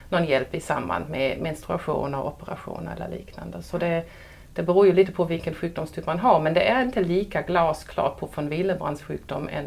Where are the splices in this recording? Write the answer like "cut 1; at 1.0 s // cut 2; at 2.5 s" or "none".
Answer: none